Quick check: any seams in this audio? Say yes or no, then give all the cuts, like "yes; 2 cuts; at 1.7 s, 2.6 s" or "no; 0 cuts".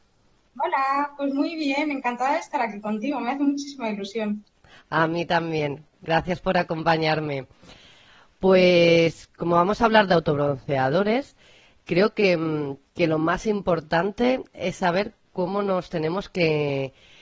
no; 0 cuts